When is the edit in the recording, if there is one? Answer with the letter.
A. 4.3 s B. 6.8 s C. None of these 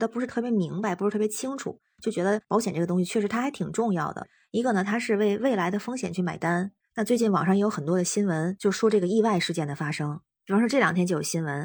B